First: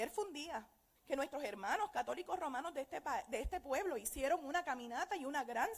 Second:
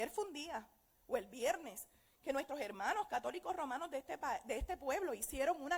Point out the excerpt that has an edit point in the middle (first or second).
first